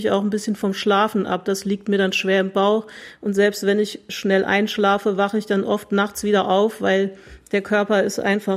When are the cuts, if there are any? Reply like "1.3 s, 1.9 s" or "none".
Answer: none